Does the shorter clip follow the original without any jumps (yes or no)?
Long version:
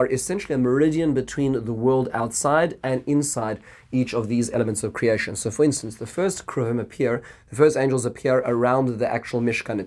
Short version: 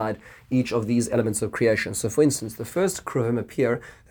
yes